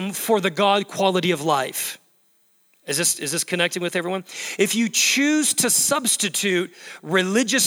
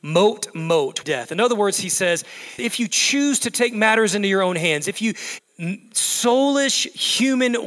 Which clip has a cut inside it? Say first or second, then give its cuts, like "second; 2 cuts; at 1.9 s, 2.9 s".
second; 3 cuts; at 1.0 s, 2.6 s, 5.4 s